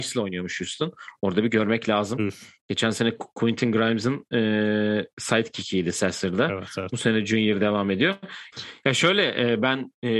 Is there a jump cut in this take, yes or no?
yes